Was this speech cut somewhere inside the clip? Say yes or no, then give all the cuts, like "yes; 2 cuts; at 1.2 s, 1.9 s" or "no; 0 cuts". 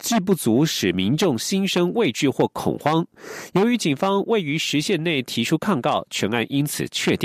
no; 0 cuts